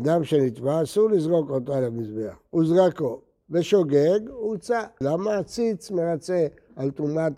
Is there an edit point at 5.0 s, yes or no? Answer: yes